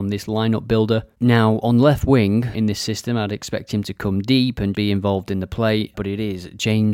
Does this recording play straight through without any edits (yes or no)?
no